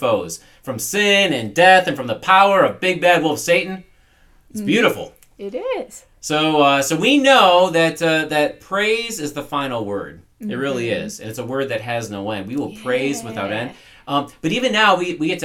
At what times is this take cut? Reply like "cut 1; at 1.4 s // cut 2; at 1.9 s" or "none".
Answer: none